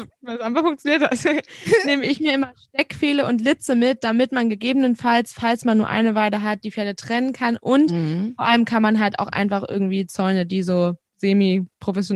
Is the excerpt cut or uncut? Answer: uncut